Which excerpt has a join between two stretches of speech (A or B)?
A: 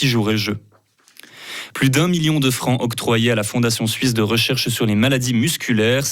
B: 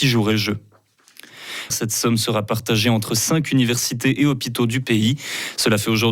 B